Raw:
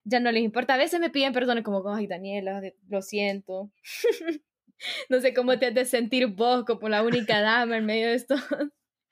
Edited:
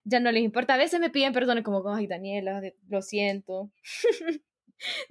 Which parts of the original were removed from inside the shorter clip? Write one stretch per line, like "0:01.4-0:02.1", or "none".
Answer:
none